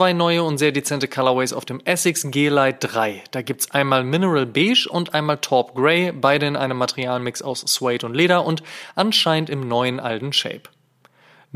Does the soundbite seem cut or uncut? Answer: uncut